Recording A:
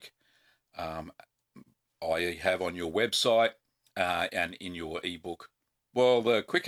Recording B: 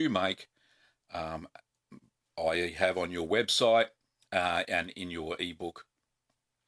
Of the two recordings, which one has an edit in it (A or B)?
A